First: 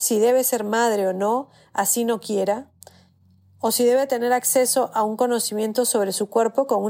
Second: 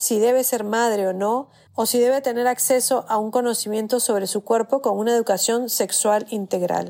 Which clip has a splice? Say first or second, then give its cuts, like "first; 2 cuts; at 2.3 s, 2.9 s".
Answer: second; 1 cut; at 1.7 s